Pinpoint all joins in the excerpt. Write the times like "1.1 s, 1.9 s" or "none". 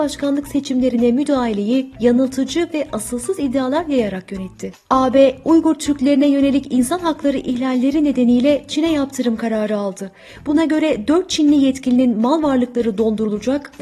none